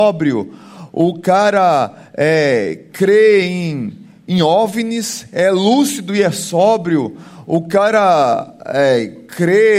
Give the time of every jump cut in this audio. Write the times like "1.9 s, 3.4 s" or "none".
none